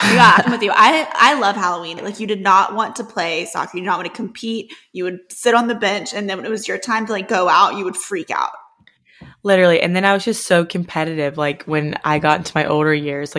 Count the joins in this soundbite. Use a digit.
1